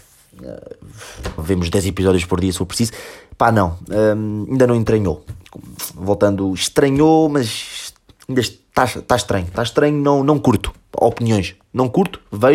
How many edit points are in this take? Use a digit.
1